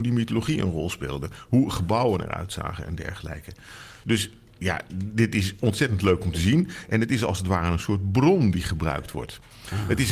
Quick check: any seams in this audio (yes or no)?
yes